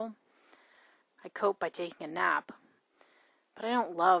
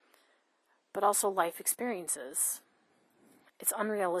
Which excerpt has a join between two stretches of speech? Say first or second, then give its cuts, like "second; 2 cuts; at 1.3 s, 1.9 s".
first; 1 cut; at 1.0 s